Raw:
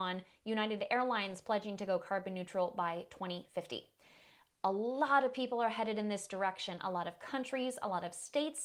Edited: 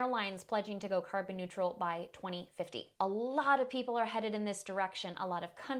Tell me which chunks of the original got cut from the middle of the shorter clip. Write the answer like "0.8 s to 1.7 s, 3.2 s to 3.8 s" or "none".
3.9 s to 4.6 s